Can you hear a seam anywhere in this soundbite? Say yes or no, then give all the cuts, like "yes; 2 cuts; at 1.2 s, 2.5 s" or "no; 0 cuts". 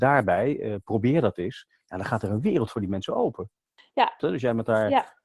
yes; 1 cut; at 4.2 s